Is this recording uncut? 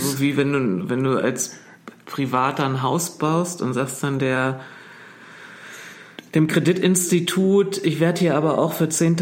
yes; 0 cuts

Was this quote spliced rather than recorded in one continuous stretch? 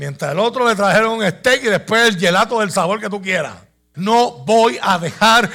yes; 1 cut; at 3.9 s

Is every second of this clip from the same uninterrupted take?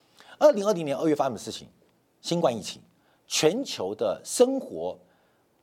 yes; 0 cuts

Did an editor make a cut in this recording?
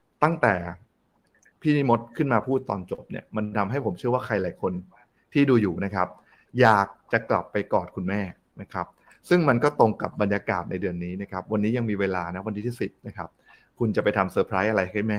no; 0 cuts

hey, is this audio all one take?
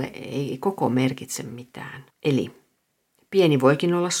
no; 1 cut; at 2.1 s

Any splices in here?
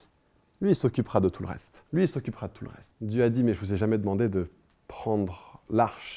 yes; 2 cuts; at 1.9 s, 2.9 s

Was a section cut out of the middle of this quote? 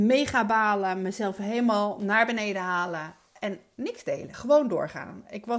yes; 1 cut; at 4.3 s

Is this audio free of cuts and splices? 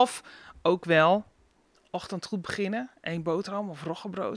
yes; 0 cuts

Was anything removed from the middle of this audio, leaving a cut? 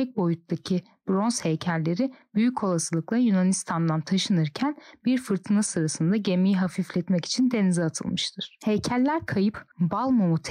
no; 0 cuts

